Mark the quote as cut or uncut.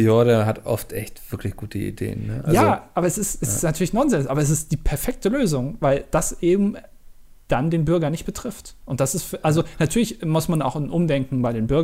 uncut